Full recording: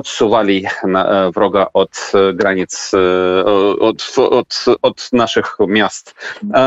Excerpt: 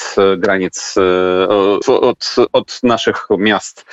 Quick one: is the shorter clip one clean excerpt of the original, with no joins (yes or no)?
no